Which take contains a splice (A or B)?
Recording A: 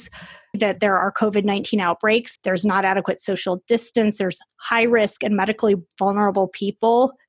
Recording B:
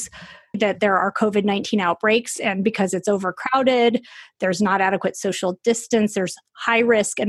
A